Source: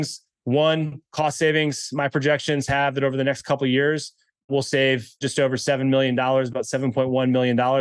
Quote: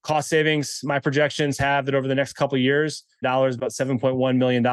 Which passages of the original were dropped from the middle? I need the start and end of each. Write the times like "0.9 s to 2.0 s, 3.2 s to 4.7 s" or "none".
4.3 s to 6.2 s